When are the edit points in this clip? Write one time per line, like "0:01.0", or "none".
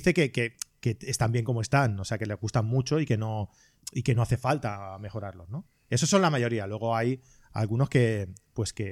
none